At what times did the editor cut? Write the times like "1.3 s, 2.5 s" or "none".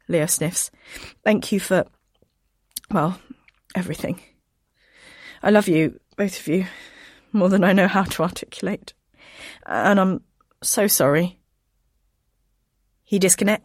10.5 s